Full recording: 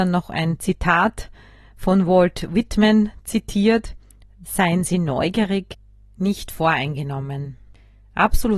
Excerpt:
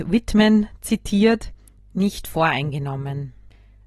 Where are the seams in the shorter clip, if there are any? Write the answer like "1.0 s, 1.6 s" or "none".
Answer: 1.8 s